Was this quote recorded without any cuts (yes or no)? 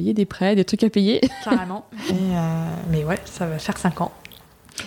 no